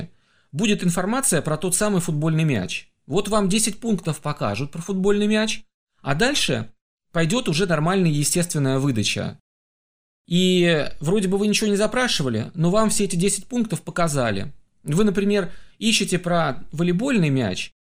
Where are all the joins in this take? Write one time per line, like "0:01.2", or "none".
none